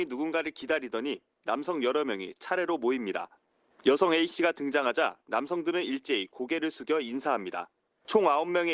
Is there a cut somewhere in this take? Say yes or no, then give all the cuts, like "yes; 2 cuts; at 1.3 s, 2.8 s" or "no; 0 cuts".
no; 0 cuts